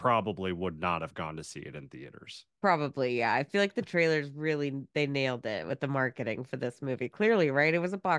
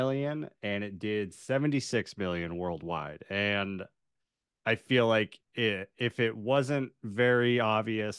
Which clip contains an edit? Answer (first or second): second